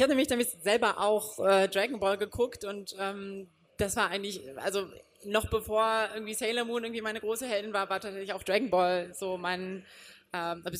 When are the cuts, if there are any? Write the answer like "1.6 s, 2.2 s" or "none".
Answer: none